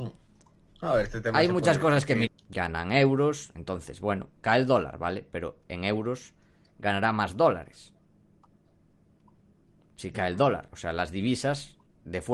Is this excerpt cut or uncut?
cut